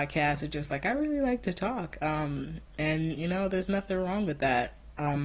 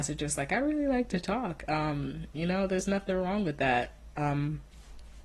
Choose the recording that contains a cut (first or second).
second